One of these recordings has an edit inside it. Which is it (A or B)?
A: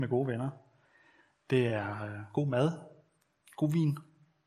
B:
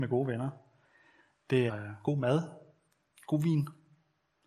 B